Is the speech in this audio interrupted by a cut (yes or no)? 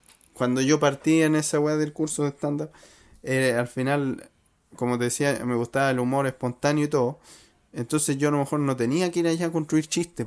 no